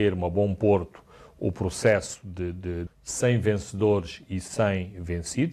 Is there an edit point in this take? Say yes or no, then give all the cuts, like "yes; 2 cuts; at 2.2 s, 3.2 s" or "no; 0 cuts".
yes; 1 cut; at 2.9 s